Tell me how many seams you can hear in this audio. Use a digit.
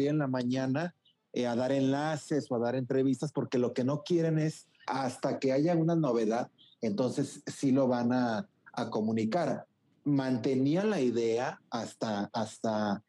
1